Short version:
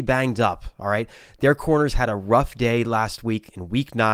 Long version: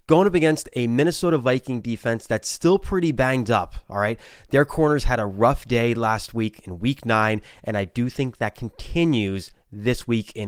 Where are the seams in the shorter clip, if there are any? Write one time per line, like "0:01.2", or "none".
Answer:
none